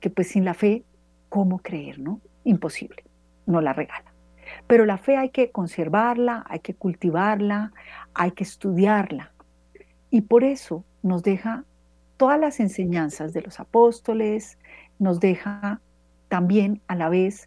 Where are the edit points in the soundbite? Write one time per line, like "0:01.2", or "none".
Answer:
none